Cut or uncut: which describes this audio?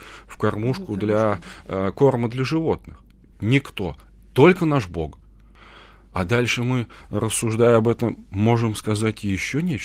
cut